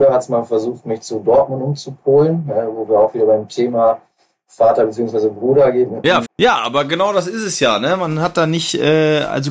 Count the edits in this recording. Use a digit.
1